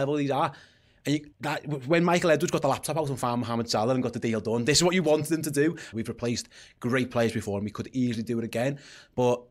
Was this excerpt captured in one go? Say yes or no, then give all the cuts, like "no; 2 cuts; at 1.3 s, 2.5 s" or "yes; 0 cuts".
no; 2 cuts; at 1.3 s, 5.9 s